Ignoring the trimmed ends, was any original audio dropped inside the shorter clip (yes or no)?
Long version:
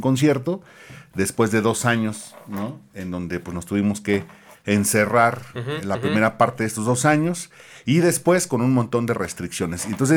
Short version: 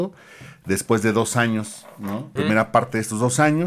yes